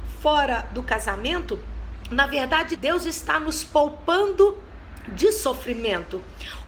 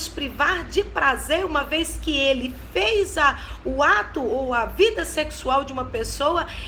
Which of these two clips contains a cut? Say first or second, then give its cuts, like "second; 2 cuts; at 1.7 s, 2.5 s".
first; 1 cut; at 2.8 s